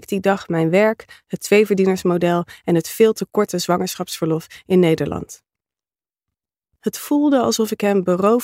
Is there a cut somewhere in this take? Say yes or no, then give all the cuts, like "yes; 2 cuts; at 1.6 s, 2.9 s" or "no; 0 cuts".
no; 0 cuts